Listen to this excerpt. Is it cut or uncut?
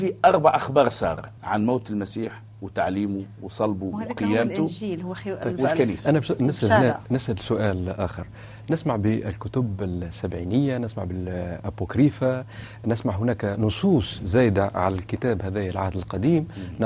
cut